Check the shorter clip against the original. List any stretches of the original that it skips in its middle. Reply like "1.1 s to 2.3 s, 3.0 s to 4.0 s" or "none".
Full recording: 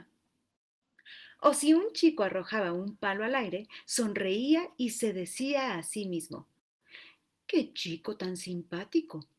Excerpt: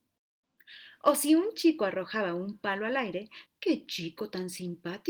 3.8 s to 7.3 s